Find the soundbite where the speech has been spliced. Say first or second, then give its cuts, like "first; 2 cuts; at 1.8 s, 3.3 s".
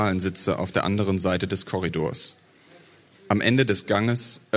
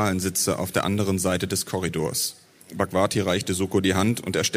second; 1 cut; at 2.6 s